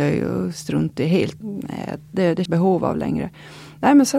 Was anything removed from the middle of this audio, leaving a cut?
yes; 2 cuts; at 1.4 s, 2.5 s

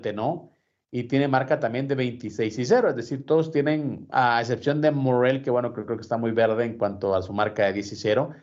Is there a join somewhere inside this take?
no; 0 cuts

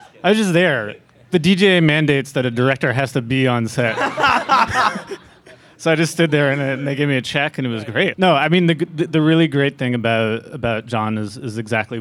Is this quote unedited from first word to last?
no; 1 cut; at 8.1 s

